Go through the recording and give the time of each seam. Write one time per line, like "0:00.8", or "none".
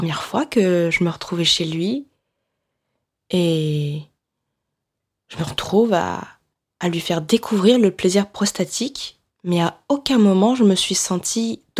none